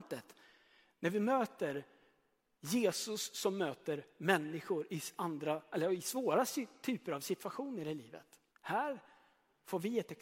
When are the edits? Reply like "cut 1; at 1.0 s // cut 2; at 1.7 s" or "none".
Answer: cut 1; at 8.5 s